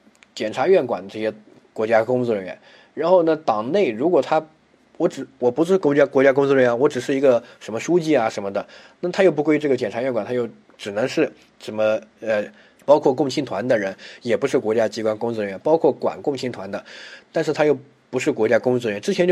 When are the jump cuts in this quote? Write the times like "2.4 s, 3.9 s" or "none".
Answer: 12.8 s, 17.2 s